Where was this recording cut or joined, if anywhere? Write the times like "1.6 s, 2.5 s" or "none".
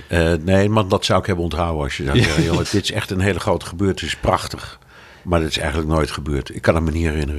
2.6 s